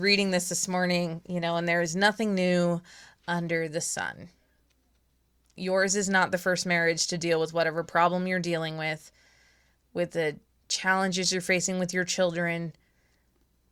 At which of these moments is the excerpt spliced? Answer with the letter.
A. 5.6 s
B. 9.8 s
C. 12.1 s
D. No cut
A